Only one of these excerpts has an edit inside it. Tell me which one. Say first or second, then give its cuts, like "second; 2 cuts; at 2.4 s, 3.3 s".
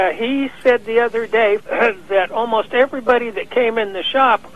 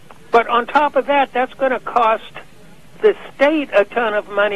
first; 1 cut; at 1.6 s